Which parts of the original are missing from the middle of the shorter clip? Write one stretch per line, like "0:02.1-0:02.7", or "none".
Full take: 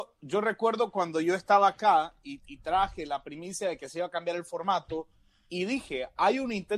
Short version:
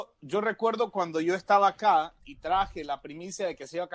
0:02.2-0:02.4